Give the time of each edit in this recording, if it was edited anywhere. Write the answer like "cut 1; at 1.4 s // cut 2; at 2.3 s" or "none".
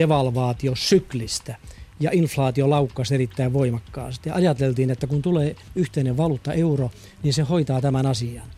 none